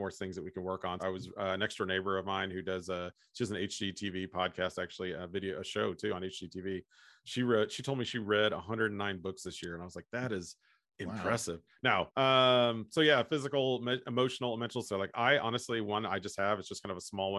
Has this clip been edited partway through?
yes; 3 cuts; at 1.0 s, 12.1 s, 14.8 s

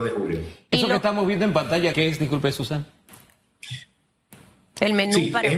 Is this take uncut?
no; 1 cut; at 1.9 s

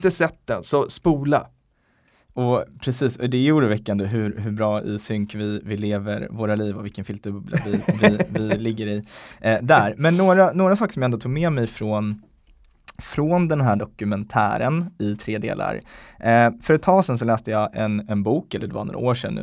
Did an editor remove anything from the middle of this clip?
no; 0 cuts

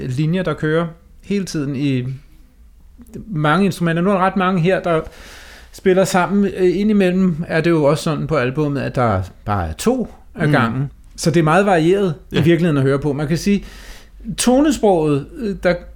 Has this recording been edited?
no; 0 cuts

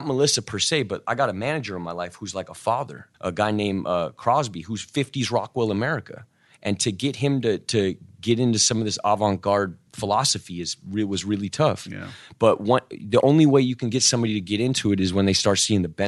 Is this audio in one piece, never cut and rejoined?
no; 1 cut; at 3.1 s

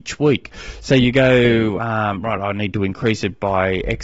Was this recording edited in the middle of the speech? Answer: no; 0 cuts

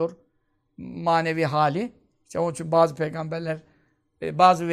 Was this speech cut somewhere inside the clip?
no; 0 cuts

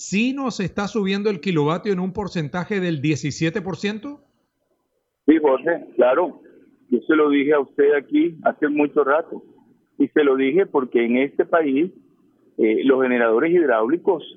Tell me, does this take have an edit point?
no; 0 cuts

